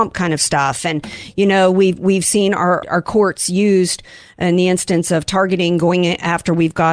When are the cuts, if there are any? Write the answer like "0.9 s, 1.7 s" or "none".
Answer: 2.8 s